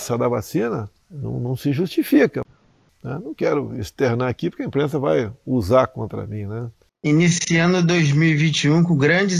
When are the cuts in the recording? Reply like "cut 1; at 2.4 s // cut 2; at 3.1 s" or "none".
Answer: cut 1; at 2.9 s // cut 2; at 6.9 s